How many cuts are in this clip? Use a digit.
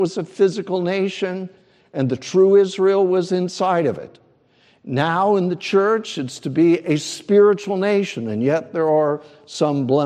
0